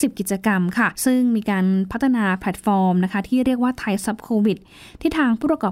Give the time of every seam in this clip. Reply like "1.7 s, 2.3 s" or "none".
1.0 s